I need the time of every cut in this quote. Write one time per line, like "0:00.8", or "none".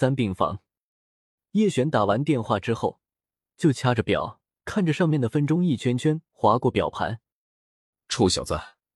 none